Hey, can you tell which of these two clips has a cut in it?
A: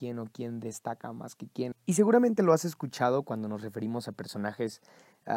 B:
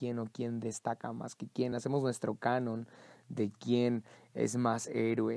A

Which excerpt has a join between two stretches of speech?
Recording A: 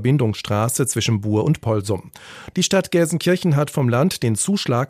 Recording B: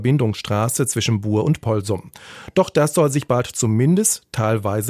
A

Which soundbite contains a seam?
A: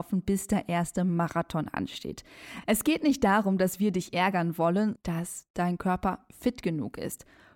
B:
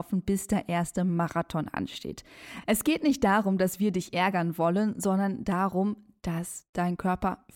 A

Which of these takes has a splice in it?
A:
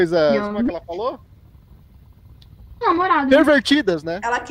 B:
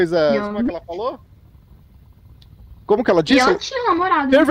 A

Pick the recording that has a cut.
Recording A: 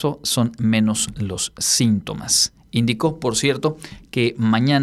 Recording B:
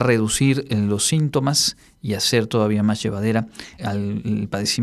B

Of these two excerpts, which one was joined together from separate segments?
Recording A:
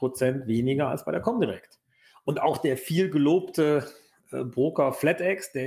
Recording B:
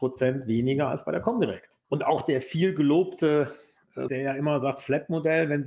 B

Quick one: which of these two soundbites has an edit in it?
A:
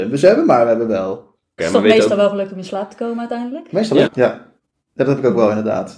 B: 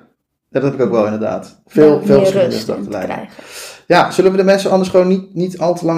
A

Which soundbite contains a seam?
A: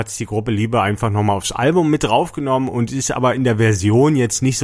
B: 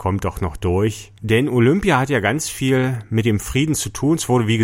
B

